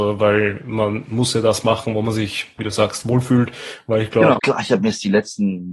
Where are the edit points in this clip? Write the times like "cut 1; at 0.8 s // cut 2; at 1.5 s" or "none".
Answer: cut 1; at 4.4 s